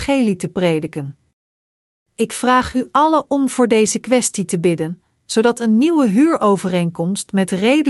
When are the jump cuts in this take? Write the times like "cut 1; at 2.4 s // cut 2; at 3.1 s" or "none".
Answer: cut 1; at 2.0 s